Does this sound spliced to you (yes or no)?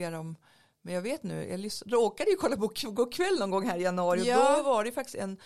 no